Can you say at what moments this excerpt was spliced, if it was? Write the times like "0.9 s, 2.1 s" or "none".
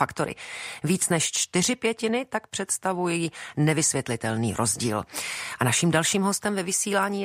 none